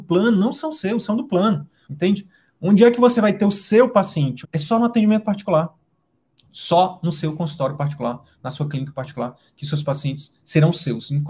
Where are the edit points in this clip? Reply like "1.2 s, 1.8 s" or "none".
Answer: 1.8 s, 4.4 s